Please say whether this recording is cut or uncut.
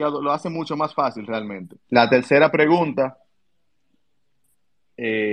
cut